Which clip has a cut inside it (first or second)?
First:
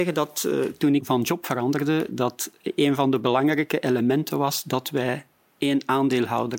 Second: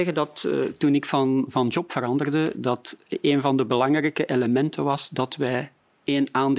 first